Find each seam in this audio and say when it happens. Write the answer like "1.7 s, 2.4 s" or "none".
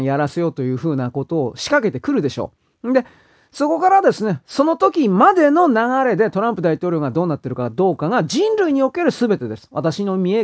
none